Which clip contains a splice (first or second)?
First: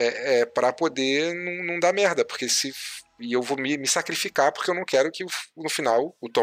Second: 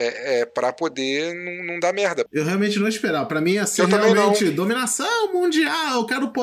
second